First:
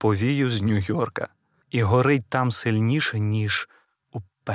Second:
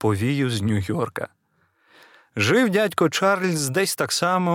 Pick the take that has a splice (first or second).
first